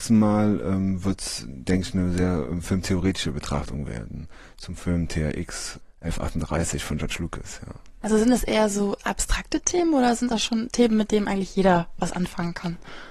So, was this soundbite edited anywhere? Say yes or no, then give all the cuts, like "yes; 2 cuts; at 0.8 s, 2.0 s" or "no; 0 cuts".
no; 0 cuts